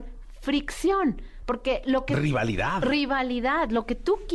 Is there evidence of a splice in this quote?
no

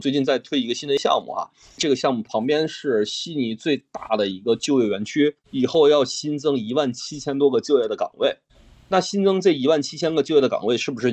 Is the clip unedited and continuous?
no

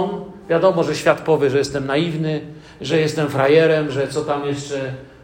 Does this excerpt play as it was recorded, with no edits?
yes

